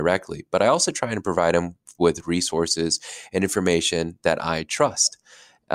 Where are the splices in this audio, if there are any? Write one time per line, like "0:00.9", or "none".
none